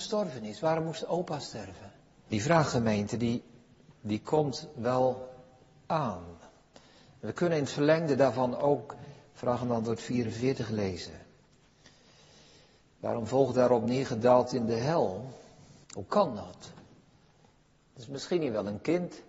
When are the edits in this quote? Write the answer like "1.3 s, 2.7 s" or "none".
2.3 s, 15.8 s